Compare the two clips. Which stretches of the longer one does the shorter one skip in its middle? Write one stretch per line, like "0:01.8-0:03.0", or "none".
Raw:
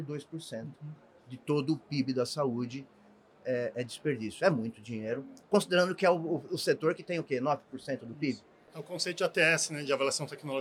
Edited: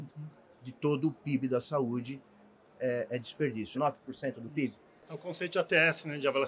0:04.4-0:07.4